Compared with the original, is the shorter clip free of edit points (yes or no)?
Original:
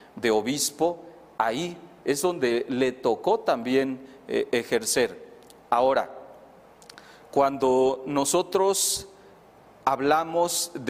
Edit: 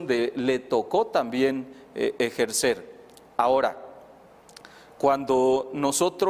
yes